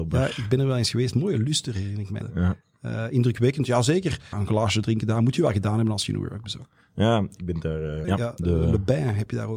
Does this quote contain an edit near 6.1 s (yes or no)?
no